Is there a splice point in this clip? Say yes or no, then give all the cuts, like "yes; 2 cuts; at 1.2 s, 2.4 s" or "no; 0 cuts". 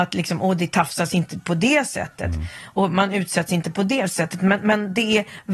no; 0 cuts